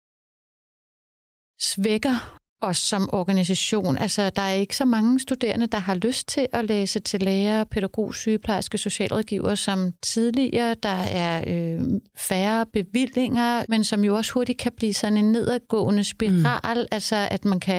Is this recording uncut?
no; 1 cut; at 13.7 s

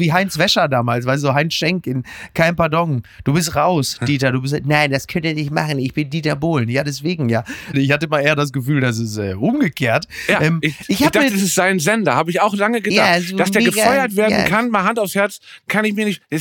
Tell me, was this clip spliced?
yes; 1 cut; at 7.7 s

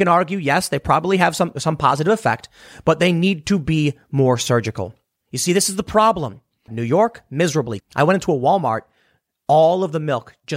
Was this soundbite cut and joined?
yes; 3 cuts; at 5.2 s, 6.7 s, 7.8 s

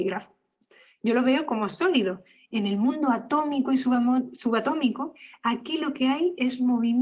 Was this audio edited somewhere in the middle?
yes; 1 cut; at 2.4 s

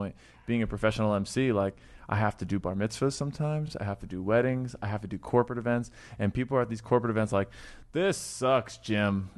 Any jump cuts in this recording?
no; 0 cuts

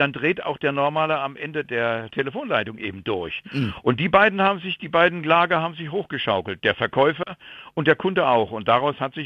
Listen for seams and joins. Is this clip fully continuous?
yes; 0 cuts

